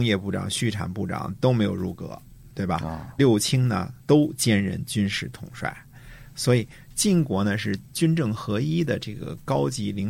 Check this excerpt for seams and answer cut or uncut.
cut